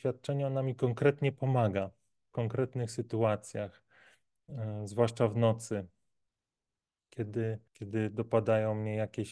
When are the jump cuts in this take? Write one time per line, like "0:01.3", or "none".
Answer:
0:07.7